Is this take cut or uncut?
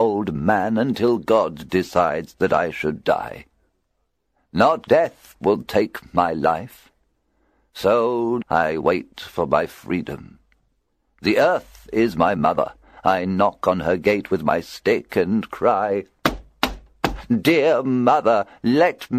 cut